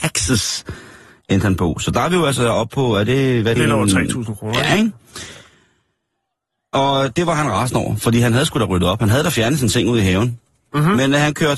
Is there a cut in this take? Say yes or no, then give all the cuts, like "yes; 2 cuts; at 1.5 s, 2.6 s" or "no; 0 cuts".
yes; 1 cut; at 3.6 s